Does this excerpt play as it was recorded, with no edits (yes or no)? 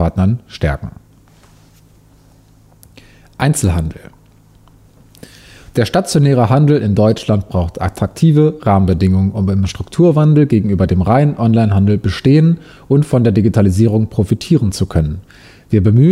yes